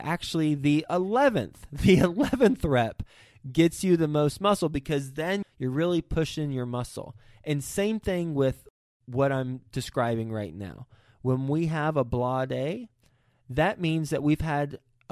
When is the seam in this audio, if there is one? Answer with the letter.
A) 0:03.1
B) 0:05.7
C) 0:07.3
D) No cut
D